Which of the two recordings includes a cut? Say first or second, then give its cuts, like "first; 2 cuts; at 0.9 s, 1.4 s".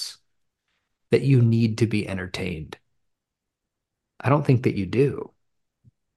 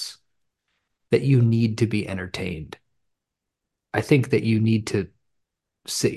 second; 1 cut; at 3.7 s